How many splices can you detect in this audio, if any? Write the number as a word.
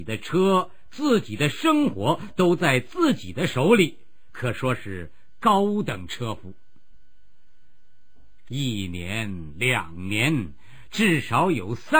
one